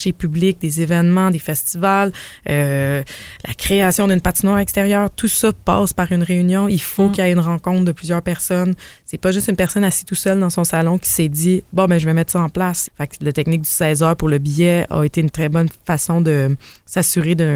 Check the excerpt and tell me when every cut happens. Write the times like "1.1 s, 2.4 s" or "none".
12.9 s

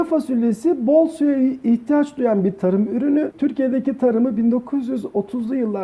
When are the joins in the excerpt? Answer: 3.3 s

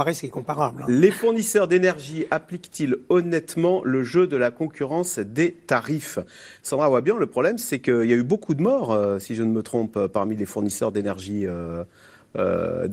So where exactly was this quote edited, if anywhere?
none

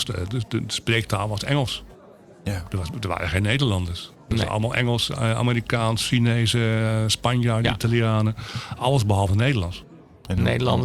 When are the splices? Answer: none

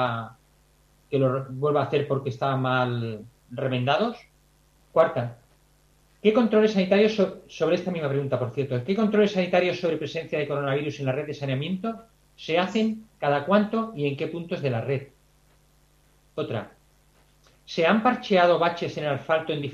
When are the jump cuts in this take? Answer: 4.8 s

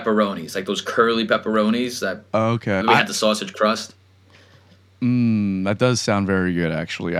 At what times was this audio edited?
2.8 s

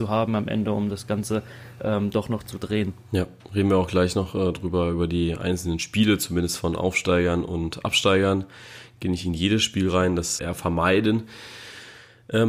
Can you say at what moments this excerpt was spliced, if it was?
10.4 s

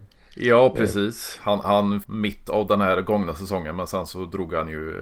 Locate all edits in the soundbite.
2.0 s

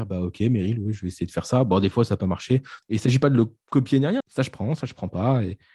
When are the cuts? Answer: 2.8 s, 4.2 s

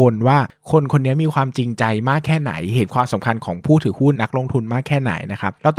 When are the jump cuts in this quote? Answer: 4.1 s

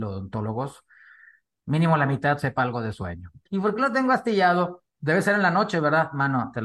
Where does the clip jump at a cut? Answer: 3.5 s

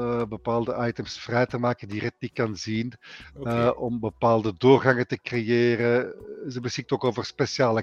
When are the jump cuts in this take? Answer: none

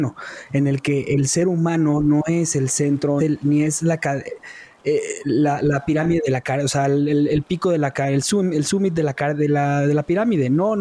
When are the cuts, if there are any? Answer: 3.2 s

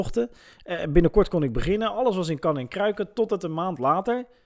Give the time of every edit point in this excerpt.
none

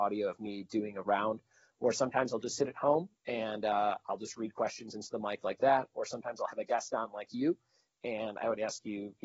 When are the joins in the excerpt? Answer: none

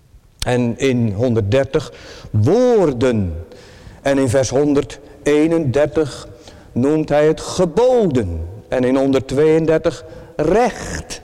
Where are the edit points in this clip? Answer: none

